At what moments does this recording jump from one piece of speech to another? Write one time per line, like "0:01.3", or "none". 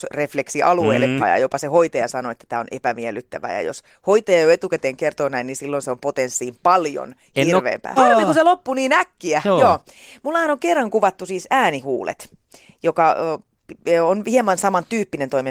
0:01.2
0:08.0

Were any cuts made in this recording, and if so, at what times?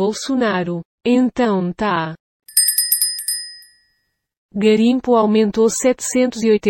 0:01.0

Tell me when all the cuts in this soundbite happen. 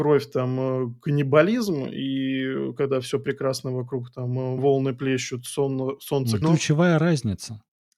0:04.6
0:06.4

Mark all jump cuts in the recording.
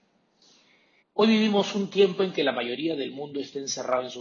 0:01.0

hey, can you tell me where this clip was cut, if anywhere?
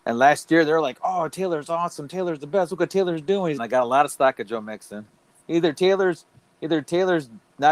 0:03.6
0:05.4

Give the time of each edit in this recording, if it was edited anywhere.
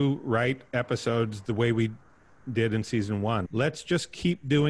0:03.5

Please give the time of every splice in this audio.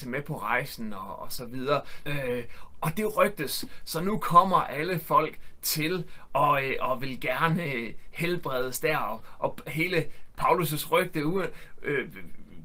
0:02.0

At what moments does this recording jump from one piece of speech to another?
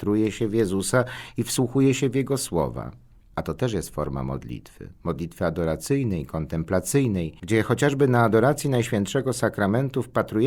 none

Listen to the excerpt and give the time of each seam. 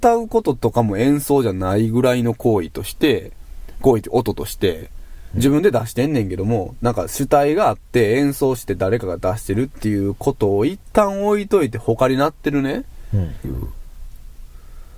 0:13.4

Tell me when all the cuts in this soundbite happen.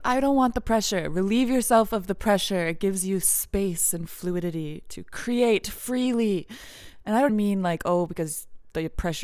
0:07.3

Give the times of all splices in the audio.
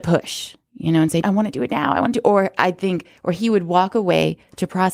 0:01.2

